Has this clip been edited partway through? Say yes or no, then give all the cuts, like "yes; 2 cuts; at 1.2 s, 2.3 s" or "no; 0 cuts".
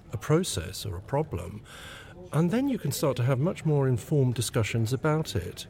no; 0 cuts